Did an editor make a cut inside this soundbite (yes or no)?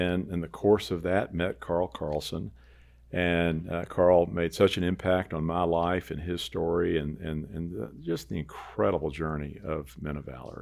no